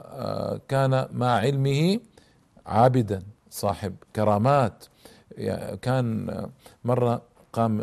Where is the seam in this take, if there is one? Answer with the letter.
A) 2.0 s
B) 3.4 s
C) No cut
B